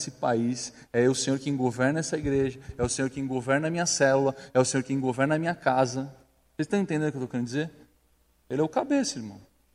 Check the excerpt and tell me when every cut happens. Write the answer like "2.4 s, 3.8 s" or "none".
8.3 s